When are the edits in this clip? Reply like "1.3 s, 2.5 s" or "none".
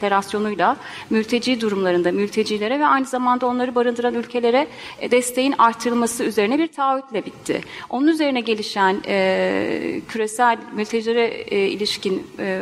none